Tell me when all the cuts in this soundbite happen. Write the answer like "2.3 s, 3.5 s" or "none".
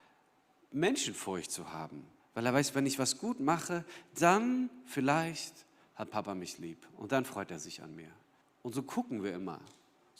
2.2 s, 8.4 s